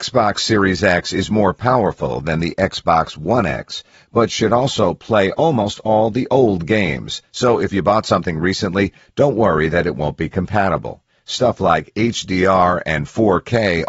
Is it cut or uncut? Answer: cut